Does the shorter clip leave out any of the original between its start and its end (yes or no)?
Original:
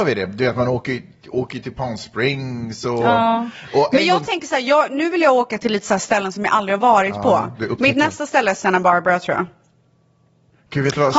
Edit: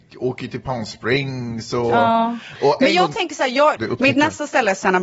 yes